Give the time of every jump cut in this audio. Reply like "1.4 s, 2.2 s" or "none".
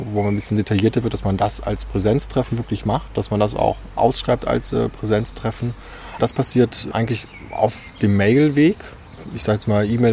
4.0 s, 6.2 s